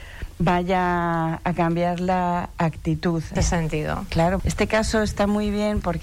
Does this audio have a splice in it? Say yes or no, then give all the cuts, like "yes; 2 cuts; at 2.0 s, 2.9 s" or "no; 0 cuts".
yes; 2 cuts; at 3.4 s, 4.4 s